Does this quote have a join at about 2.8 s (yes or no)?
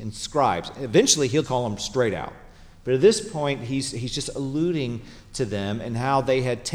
no